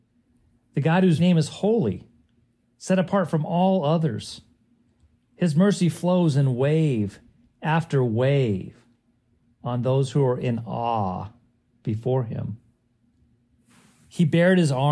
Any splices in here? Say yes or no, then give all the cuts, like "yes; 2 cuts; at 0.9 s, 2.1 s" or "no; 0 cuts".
yes; 1 cut; at 1.2 s